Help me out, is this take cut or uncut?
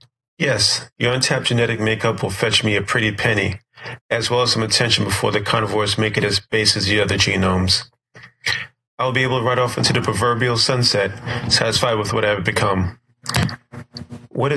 uncut